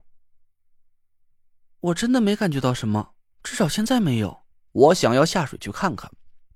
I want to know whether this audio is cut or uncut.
cut